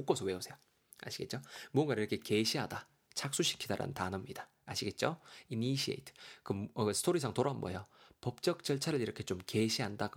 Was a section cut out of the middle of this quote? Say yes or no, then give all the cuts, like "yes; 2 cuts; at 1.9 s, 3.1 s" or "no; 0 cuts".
no; 0 cuts